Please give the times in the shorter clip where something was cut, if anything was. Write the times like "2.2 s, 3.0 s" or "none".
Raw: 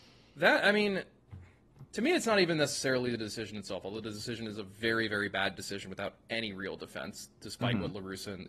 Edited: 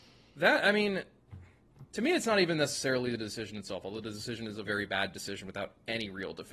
4.7 s